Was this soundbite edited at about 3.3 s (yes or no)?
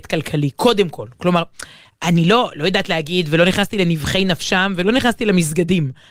no